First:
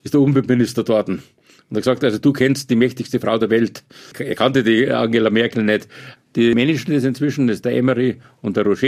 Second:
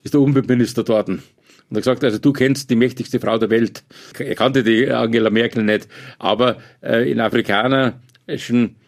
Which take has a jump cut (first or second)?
first